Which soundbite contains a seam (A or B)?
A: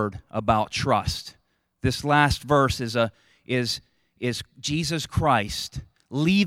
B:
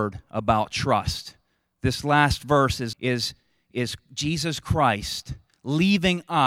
B